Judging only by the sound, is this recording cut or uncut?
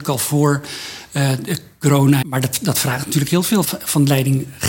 cut